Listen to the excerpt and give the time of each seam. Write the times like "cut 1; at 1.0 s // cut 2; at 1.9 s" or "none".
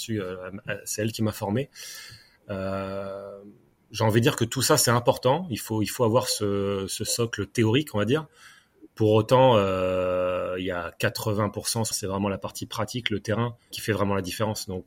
cut 1; at 11.9 s // cut 2; at 13.7 s

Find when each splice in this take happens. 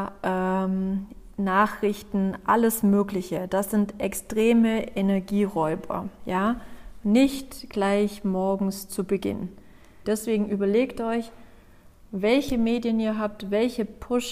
cut 1; at 10.0 s

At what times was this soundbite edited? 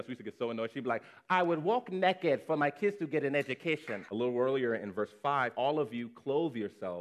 cut 1; at 4.1 s // cut 2; at 5.5 s

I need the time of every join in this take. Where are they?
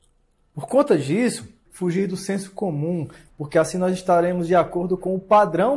cut 1; at 1.7 s // cut 2; at 3.3 s

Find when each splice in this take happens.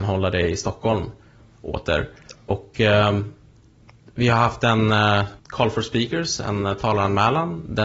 cut 1; at 2.3 s // cut 2; at 5.4 s

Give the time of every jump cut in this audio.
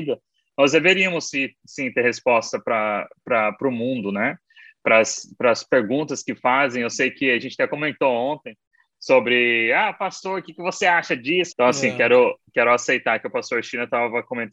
cut 1; at 11.5 s

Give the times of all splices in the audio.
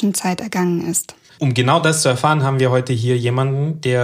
none

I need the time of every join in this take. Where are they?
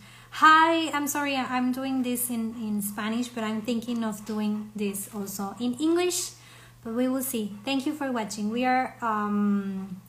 none

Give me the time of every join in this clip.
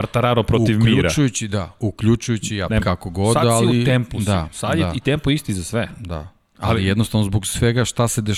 cut 1; at 2.8 s

